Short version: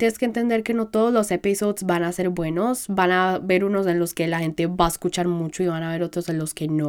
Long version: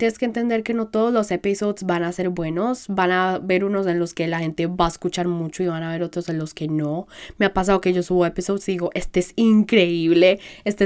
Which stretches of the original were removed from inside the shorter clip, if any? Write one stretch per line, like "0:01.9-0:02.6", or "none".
none